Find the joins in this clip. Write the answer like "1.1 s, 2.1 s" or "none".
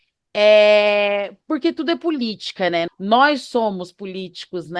2.9 s